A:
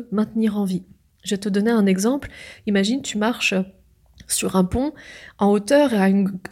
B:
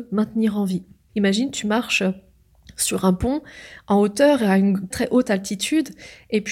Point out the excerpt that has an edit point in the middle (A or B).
B